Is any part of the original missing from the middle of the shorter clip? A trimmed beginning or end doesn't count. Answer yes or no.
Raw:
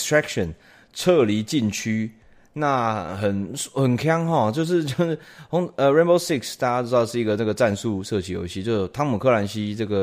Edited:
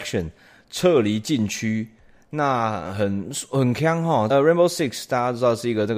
yes